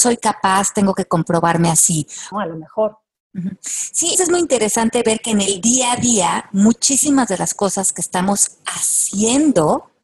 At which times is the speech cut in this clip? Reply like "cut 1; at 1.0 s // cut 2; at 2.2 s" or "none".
cut 1; at 2.3 s // cut 2; at 4.1 s